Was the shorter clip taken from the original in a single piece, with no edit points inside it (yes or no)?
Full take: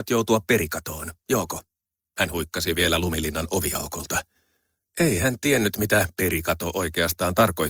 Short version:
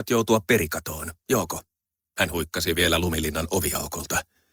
yes